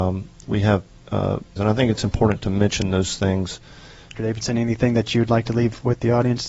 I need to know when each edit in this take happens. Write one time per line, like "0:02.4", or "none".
0:01.6
0:04.1